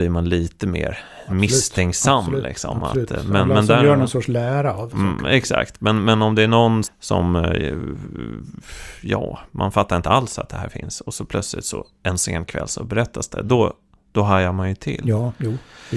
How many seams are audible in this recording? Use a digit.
2